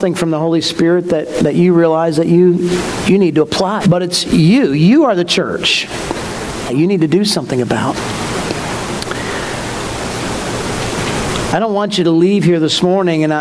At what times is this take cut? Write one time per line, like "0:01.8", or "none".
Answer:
0:03.8
0:06.7